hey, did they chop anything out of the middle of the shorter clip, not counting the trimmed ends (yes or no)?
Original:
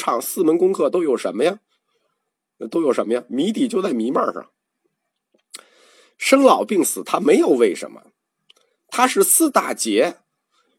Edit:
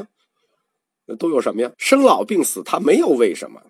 yes